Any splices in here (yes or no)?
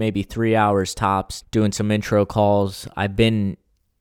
yes